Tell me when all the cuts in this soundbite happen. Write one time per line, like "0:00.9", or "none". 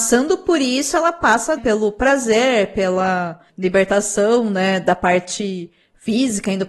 0:01.6